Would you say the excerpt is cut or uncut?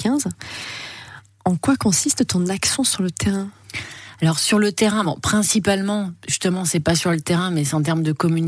uncut